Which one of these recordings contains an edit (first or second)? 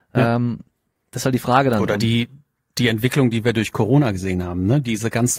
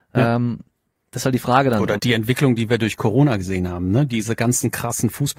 second